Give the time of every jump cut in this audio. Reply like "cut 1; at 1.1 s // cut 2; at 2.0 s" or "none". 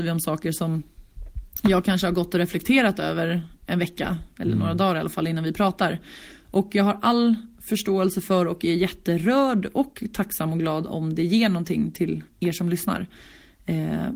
none